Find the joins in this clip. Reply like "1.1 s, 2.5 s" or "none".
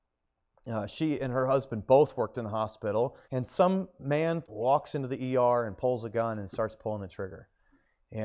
3.2 s, 4.4 s